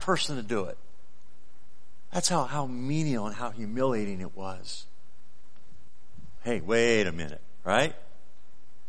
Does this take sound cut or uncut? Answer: cut